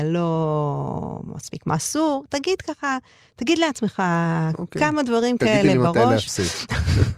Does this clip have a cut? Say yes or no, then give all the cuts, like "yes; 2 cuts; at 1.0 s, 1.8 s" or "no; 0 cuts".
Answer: no; 0 cuts